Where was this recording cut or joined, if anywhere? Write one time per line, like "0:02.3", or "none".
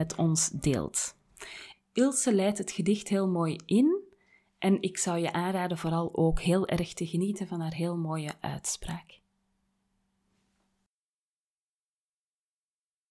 0:01.7